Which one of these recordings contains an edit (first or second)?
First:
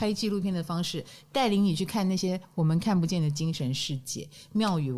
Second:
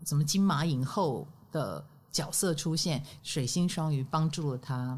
second